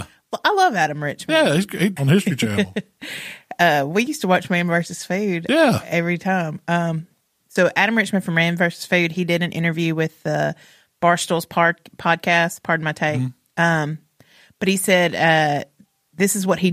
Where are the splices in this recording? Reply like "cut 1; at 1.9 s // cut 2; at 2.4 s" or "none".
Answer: cut 1; at 2.0 s